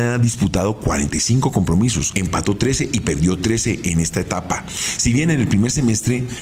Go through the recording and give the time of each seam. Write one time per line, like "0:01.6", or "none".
0:02.1